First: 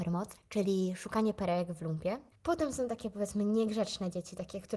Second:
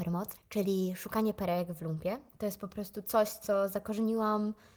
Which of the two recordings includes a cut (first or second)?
first